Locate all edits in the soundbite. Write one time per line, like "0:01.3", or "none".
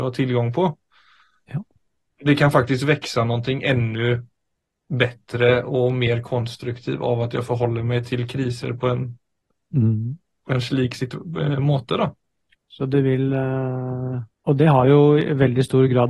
0:12.6
0:14.3